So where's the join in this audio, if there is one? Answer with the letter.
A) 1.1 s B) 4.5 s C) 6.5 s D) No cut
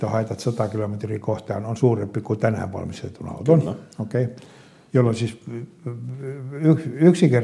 D